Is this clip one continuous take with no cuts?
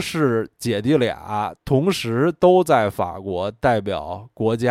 no; 1 cut; at 1.6 s

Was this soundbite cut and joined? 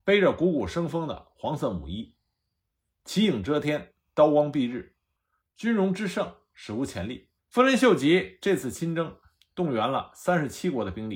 yes; 1 cut; at 7.4 s

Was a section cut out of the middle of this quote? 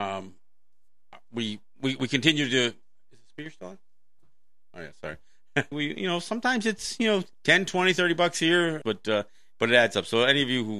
yes; 3 cuts; at 5.7 s, 7.3 s, 8.8 s

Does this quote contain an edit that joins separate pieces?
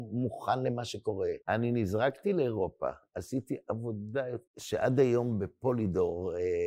yes; 2 cuts; at 1.4 s, 4.5 s

